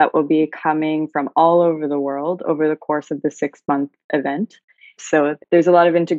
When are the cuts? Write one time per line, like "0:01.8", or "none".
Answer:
0:05.0